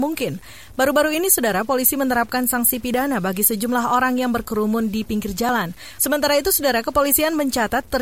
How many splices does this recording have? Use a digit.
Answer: 1